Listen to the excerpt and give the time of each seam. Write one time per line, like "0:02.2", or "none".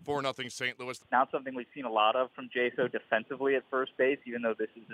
0:01.0